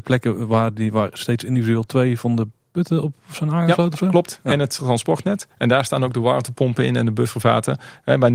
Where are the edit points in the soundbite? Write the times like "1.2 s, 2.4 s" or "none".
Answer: none